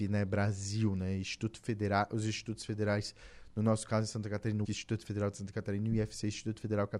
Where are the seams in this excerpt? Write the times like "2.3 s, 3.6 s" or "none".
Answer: 4.6 s